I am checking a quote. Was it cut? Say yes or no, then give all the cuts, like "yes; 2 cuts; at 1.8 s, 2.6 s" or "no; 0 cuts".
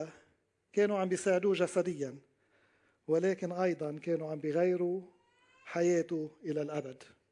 no; 0 cuts